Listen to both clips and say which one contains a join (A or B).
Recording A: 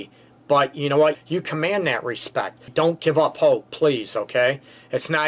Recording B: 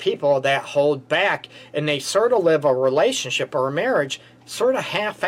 A